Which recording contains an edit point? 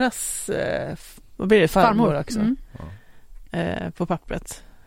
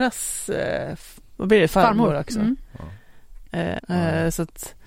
second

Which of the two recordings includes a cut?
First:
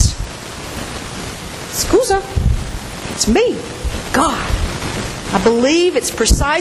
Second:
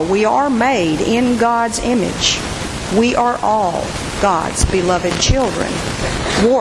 first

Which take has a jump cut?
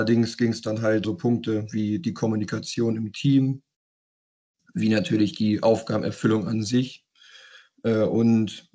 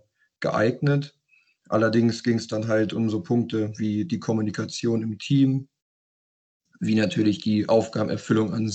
first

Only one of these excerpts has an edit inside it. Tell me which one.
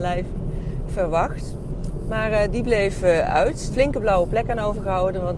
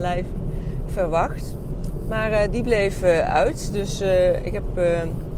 first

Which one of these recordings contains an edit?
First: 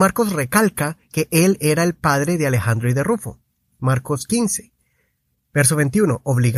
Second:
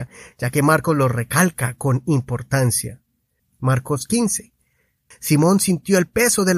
second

